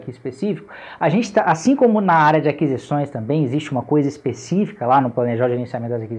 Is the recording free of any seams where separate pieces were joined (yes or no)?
yes